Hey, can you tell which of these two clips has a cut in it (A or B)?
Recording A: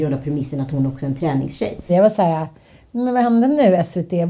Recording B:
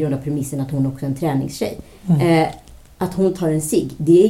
A